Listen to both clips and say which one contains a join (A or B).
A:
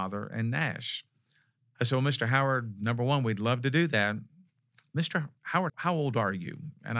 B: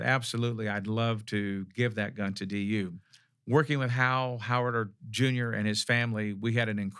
A